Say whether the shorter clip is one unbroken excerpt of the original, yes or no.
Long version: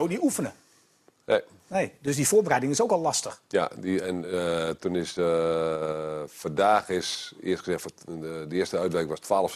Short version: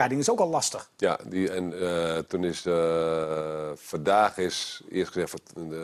yes